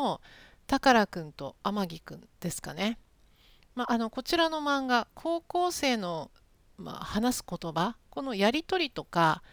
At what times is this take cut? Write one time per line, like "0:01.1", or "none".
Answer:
none